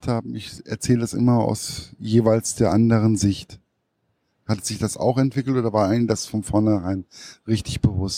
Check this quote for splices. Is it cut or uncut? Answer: uncut